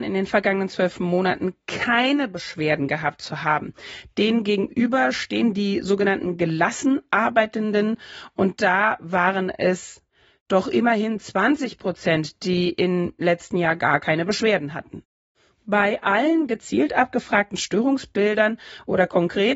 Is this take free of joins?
yes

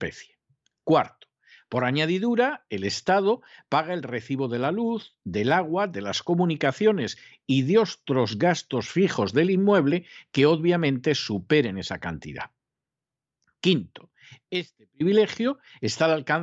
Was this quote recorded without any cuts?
yes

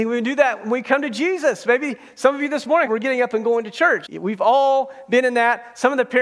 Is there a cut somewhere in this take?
yes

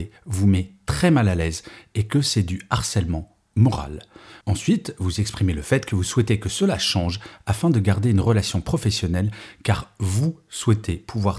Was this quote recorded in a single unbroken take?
yes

